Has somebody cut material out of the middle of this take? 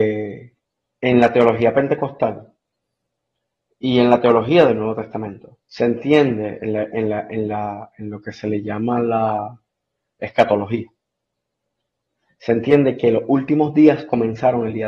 yes; 1 cut; at 5.6 s

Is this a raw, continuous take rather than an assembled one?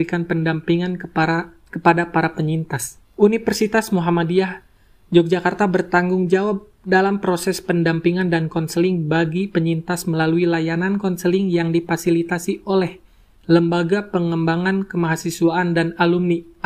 yes; 0 cuts

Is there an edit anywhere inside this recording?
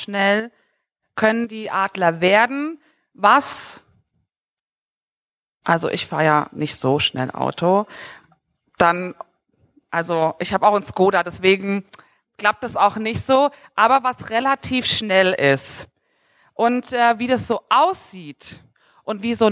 no; 0 cuts

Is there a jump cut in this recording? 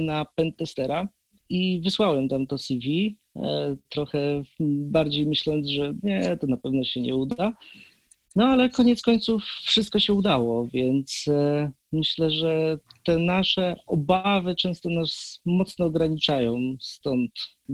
yes; 1 cut; at 1.3 s

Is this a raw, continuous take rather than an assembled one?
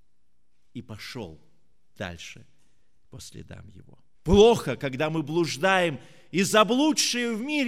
no; 1 cut; at 4.1 s

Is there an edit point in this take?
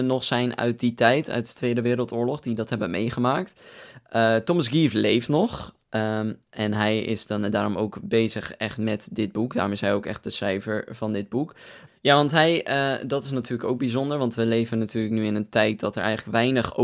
yes; 2 cuts; at 5.8 s, 11.9 s

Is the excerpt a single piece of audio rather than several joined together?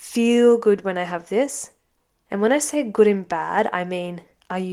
no; 1 cut; at 2.3 s

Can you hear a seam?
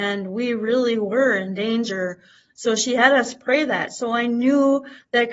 no; 0 cuts

